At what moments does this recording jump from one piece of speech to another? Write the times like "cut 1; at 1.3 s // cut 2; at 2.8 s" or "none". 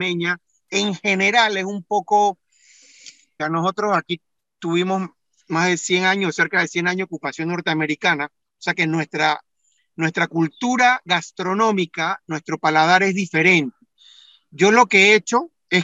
cut 1; at 3.4 s